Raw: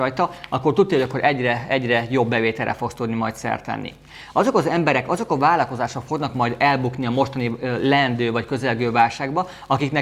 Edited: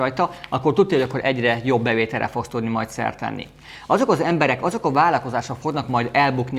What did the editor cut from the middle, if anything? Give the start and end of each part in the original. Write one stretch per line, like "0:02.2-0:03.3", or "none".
0:01.2-0:01.7